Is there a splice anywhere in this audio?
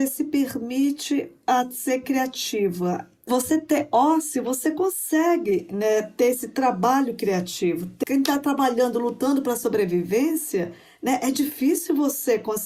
no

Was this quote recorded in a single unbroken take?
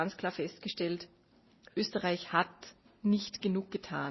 yes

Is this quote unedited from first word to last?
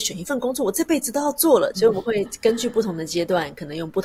no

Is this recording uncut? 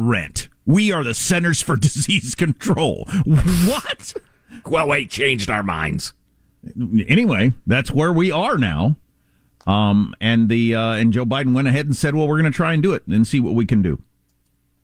no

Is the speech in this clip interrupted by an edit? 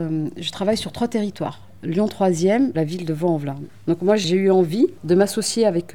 yes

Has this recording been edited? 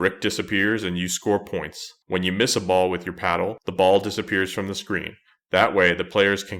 yes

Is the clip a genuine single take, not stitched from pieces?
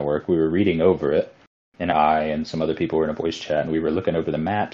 no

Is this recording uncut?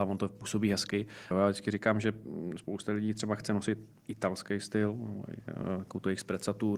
no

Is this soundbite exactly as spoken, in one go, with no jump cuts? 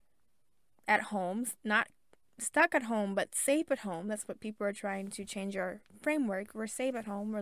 yes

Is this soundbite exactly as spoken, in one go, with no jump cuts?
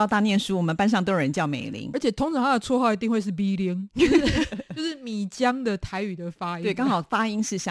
yes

